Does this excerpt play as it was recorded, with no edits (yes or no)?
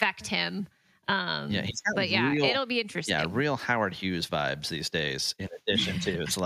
yes